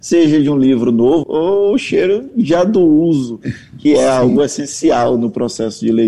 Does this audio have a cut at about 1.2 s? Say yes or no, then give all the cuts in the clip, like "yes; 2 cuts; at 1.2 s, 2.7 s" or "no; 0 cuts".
yes; 1 cut; at 1.2 s